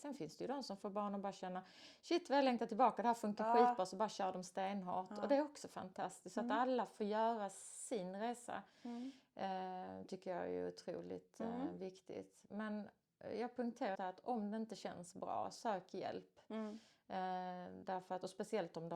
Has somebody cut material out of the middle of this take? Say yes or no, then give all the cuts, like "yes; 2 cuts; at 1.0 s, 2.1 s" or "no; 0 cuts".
yes; 1 cut; at 13.9 s